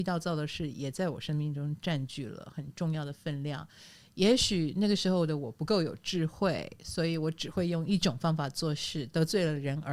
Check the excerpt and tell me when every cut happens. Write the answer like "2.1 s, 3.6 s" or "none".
none